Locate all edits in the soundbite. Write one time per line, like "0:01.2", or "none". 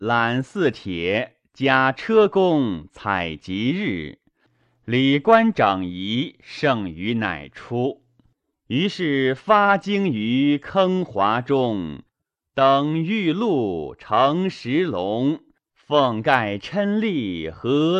none